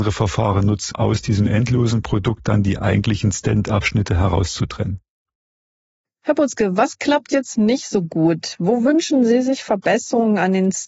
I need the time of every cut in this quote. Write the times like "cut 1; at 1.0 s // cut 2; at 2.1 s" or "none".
cut 1; at 0.9 s